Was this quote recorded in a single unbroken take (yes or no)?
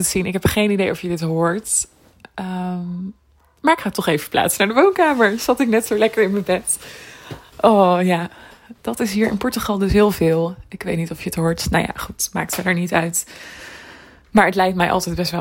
yes